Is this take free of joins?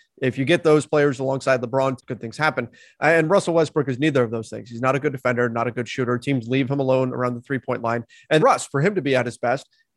no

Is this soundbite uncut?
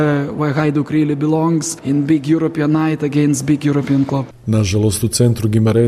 yes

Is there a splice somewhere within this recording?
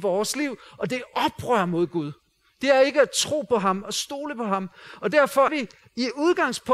yes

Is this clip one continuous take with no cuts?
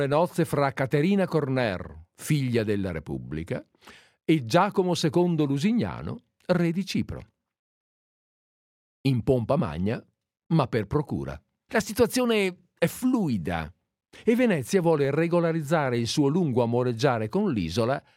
no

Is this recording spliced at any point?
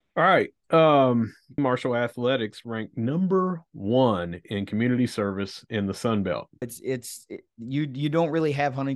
yes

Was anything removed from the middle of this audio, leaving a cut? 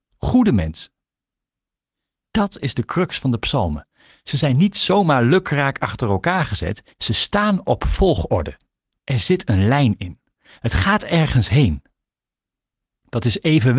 yes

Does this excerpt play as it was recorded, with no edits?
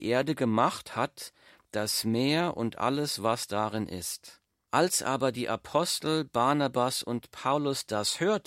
no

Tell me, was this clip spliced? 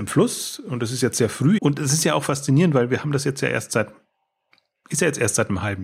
yes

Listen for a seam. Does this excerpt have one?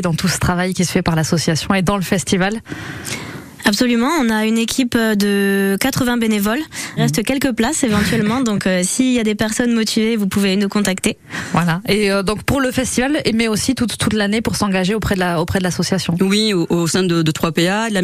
yes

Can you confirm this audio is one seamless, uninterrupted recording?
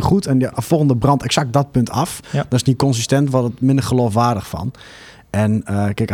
yes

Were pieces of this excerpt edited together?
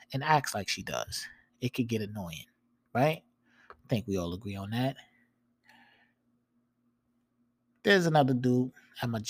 no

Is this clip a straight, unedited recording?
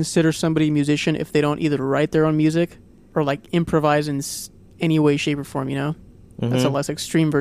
yes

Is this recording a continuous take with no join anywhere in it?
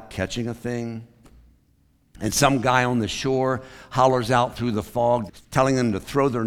no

